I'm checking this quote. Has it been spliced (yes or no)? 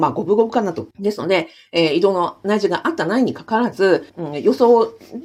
yes